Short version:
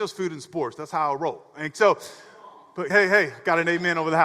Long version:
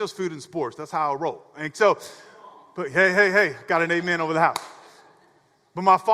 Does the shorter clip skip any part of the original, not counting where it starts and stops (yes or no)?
yes